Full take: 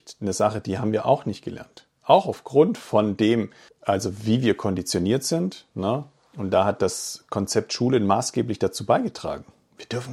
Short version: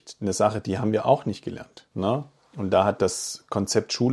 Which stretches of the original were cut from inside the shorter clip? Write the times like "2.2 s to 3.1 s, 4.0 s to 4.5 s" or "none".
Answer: 1.9 s to 5.7 s

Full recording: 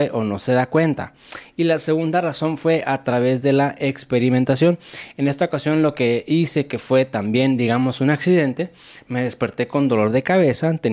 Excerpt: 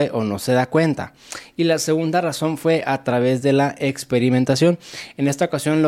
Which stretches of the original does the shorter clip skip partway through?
none

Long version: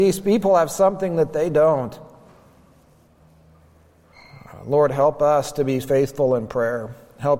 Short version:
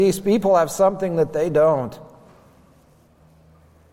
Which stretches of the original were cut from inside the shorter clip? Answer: none

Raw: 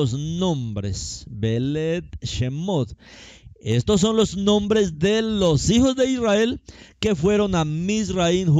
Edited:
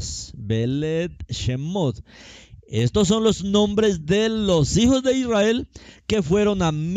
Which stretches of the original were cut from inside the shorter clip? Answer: none

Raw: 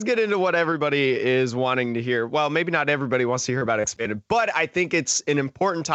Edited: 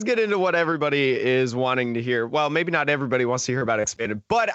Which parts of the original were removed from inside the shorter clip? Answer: none

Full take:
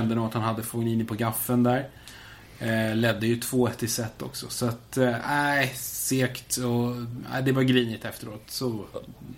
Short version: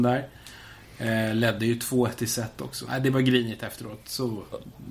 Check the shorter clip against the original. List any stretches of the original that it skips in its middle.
4.5 s to 7.3 s

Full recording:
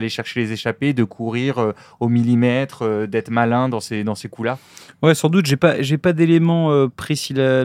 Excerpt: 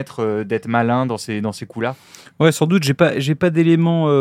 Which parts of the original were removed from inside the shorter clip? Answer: none

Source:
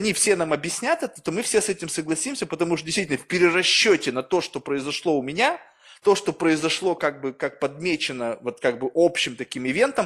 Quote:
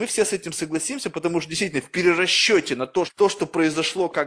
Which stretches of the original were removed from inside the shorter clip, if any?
4.4 s to 5.9 s

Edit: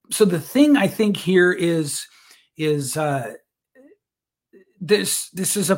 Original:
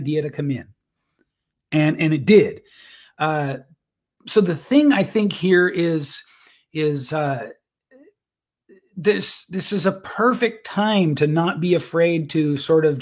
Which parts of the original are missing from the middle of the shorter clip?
none

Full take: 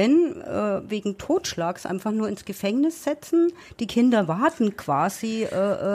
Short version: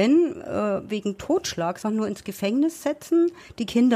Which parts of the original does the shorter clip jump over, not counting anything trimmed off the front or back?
1.8 s to 2.0 s

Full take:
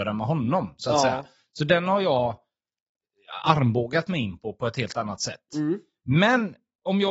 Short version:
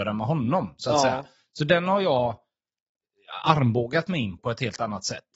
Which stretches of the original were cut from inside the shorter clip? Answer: 4.4 s to 4.6 s

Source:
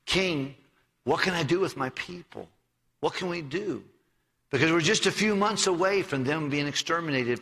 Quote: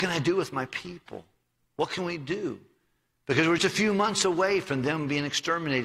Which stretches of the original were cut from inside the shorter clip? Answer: 4.8 s to 5.0 s

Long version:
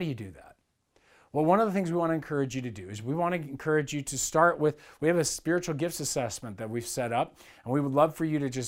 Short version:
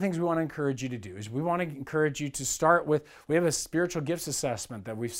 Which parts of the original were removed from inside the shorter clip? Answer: none

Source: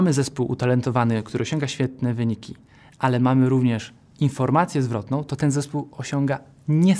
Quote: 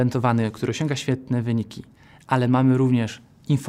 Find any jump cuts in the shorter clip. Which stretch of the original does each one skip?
none

